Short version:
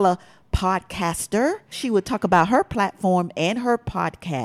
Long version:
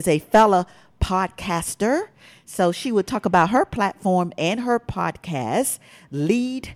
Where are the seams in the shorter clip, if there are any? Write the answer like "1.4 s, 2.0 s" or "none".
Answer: 1.7 s